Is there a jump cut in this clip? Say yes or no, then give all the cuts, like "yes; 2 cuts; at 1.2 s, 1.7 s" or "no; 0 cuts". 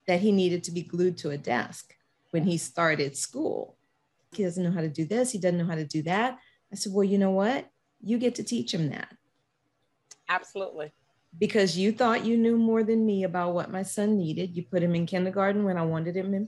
yes; 1 cut; at 4.3 s